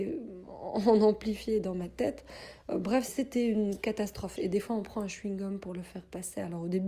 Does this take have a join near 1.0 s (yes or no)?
no